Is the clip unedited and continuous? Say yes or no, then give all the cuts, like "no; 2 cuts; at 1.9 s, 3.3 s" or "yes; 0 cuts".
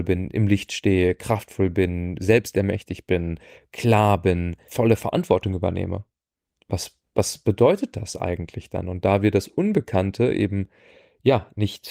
no; 1 cut; at 4.7 s